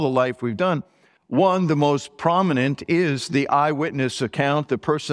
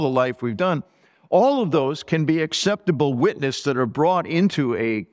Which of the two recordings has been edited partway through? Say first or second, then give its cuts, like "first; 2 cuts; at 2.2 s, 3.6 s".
first; 1 cut; at 1.2 s